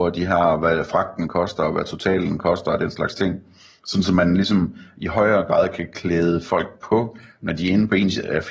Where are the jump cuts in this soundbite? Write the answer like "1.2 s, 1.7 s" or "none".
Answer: none

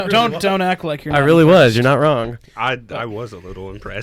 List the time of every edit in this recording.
none

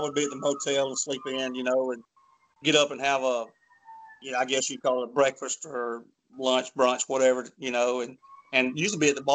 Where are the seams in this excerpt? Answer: none

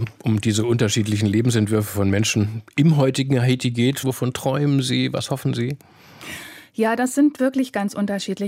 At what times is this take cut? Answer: 4.0 s

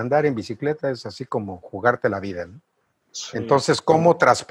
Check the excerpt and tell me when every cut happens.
3.1 s

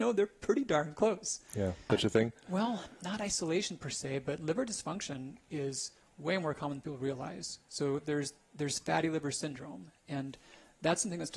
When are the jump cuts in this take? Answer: 1.9 s, 7.6 s

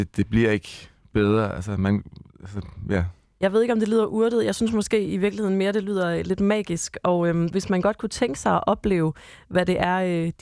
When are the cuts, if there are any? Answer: 2.3 s

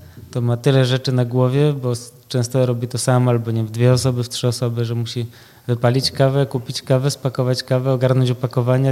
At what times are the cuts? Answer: none

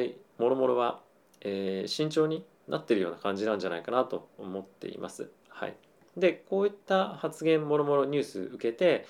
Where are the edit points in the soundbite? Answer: 5.4 s

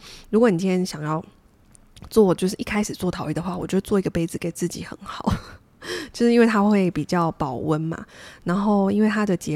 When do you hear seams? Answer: none

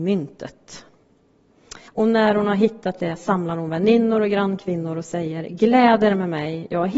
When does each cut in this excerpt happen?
1.9 s

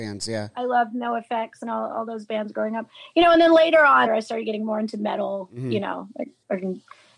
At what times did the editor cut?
4.1 s

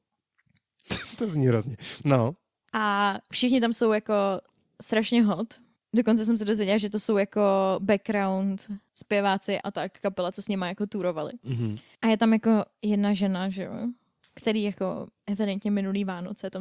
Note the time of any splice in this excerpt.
9.6 s

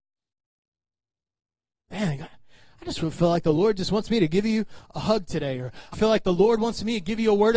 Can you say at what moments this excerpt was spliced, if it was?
5.9 s

